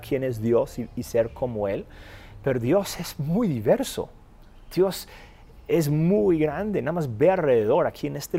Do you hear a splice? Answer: no; 0 cuts

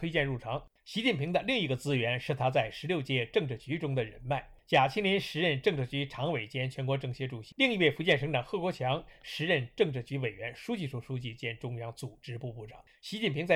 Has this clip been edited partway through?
yes; 1 cut; at 7.5 s

